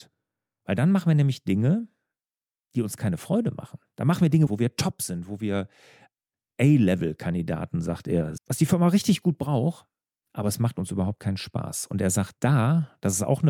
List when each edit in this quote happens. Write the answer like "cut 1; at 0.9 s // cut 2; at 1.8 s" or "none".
cut 1; at 4.5 s // cut 2; at 8.4 s